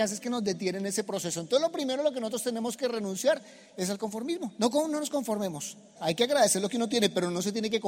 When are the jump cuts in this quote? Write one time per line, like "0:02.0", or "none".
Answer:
0:06.0